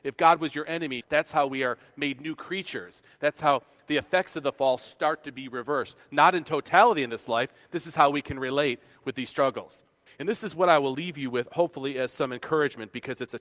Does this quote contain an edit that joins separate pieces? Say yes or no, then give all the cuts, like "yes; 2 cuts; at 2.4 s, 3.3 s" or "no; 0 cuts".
yes; 2 cuts; at 1.0 s, 10.1 s